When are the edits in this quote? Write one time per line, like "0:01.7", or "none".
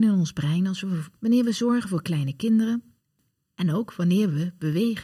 0:01.2